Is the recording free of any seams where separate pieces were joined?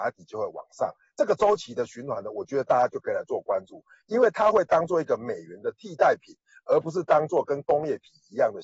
yes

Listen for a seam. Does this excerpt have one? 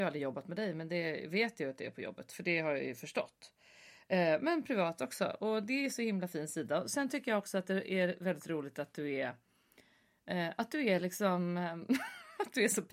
no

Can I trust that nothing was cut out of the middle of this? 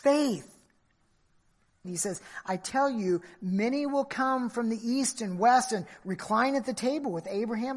no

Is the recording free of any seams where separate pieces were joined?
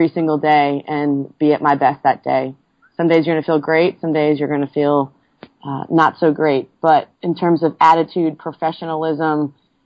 no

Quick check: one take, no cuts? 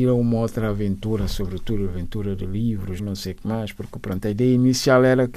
no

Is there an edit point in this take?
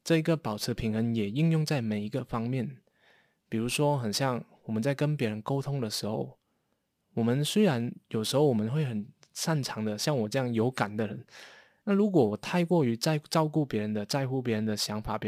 yes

